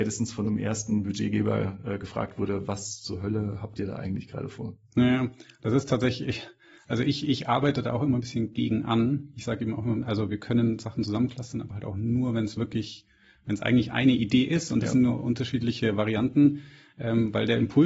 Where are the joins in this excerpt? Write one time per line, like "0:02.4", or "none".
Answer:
none